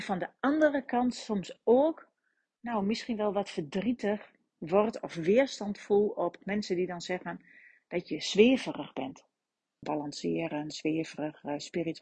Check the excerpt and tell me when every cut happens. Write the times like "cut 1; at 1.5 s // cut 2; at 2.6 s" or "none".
cut 1; at 9.8 s